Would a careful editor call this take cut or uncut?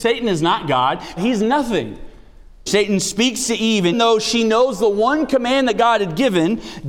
cut